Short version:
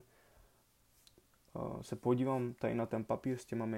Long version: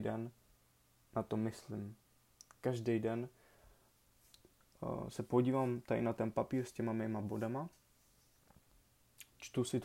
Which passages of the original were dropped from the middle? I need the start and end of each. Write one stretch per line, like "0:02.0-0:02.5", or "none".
none